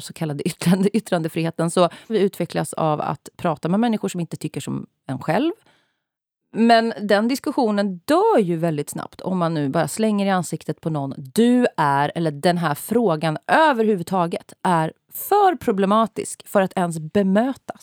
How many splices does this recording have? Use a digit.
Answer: 1